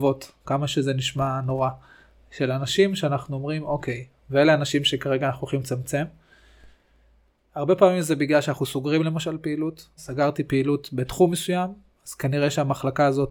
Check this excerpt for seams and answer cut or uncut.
cut